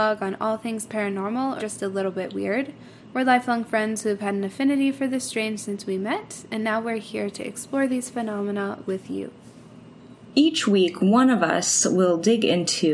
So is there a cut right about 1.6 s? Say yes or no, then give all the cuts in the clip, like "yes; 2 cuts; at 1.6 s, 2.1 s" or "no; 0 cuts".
yes; 1 cut; at 1.6 s